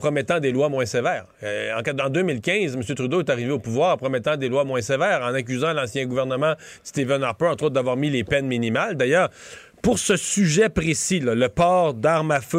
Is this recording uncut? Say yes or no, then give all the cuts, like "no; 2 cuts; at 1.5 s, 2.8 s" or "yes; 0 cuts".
yes; 0 cuts